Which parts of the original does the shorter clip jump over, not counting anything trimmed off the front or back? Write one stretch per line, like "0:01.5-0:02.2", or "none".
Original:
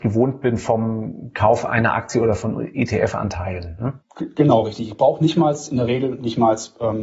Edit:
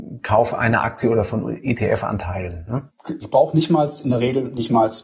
0:04.3-0:04.9

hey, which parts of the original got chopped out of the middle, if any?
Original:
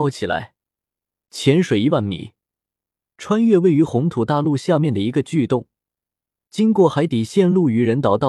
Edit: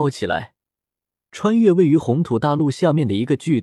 0:01.2-0:03.0

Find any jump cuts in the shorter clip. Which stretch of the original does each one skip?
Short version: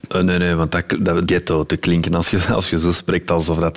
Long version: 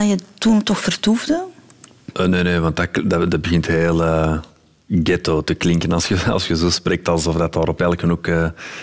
0:03.3-0:05.0

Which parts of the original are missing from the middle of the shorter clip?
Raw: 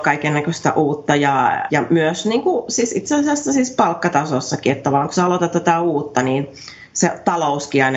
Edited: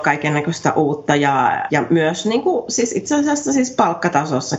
none

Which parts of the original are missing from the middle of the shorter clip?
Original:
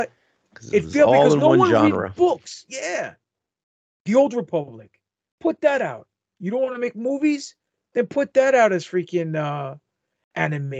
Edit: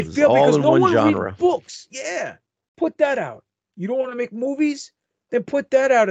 0:03.4-0:05.3

